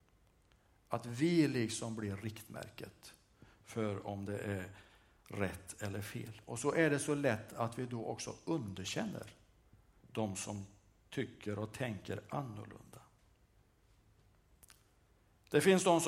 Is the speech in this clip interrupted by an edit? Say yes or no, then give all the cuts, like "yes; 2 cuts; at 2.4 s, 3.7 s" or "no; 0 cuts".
no; 0 cuts